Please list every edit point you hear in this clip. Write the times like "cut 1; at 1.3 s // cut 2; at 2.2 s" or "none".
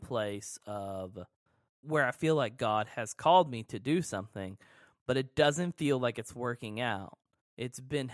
none